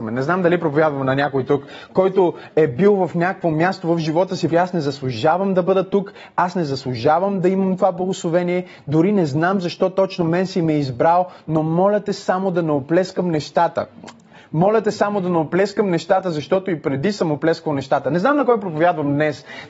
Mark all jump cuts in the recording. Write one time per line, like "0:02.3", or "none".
0:04.5